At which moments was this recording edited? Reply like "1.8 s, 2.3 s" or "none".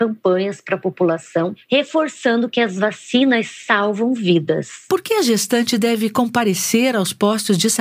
none